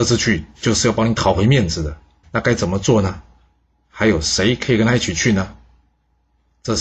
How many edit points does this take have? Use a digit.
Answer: 1